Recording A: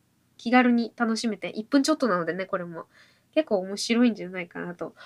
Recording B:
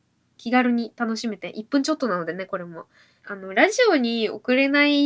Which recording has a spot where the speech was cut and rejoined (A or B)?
B